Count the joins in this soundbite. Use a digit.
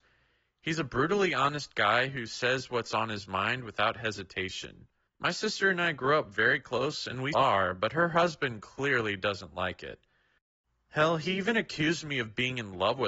1